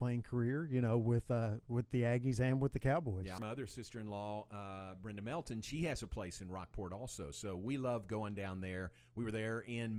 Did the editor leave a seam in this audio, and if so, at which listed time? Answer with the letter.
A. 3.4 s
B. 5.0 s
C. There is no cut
A